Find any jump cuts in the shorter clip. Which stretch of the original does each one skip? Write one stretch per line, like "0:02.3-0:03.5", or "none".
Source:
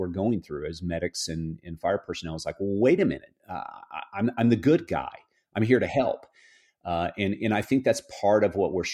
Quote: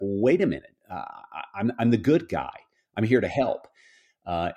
none